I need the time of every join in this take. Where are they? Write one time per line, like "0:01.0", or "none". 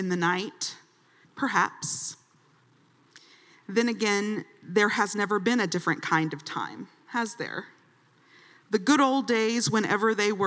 0:01.2